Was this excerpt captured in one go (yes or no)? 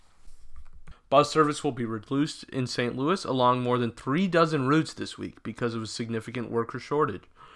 no